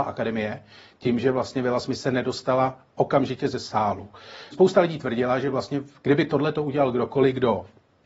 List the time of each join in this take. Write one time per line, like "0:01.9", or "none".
0:04.5

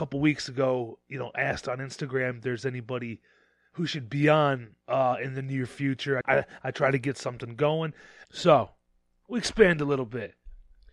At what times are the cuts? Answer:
0:04.8
0:06.2
0:08.2

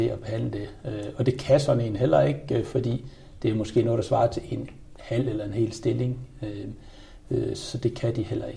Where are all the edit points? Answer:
none

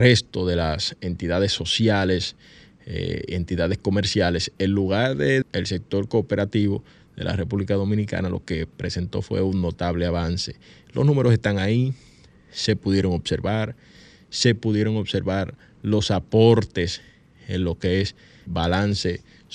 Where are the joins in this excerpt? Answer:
0:05.4
0:18.5

